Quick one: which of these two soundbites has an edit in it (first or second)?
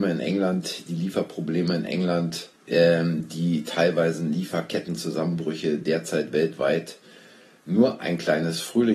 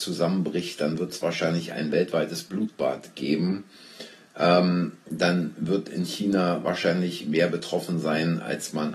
first